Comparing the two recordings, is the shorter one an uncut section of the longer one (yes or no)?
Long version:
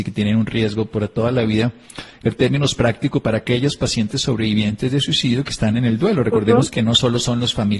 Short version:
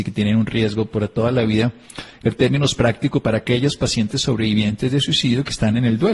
yes